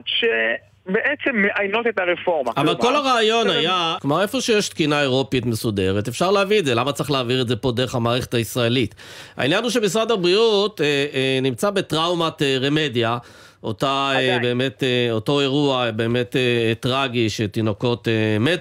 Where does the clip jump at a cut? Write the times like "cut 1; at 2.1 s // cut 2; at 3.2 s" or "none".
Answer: cut 1; at 4.0 s